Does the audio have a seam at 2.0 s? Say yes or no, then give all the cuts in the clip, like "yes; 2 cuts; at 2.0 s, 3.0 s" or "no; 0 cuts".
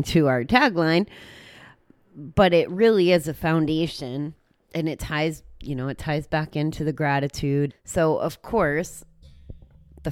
no; 1 cut; at 7.7 s